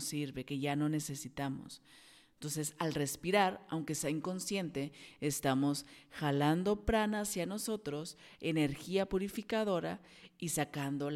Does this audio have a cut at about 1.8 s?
no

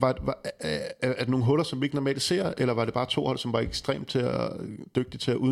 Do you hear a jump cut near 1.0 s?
yes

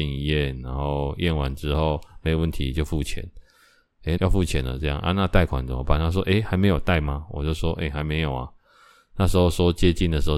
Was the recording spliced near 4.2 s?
yes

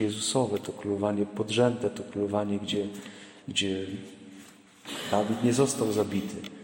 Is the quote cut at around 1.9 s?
no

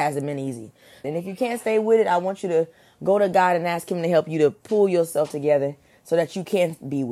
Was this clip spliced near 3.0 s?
no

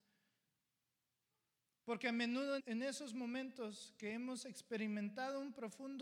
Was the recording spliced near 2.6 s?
yes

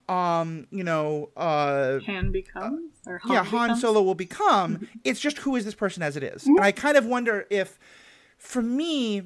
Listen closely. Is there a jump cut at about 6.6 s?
no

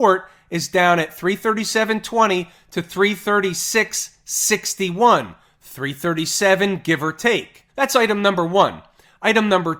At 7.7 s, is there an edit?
yes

